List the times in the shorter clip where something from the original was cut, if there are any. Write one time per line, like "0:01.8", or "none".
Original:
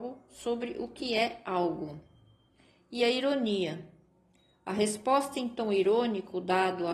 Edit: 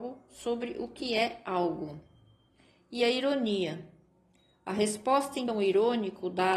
0:05.5